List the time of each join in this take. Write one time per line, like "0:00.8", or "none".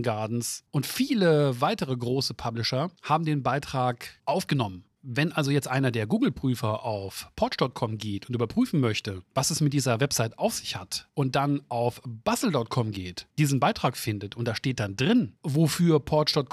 0:05.0